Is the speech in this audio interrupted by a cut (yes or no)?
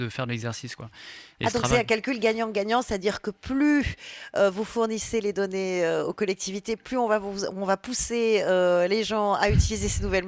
no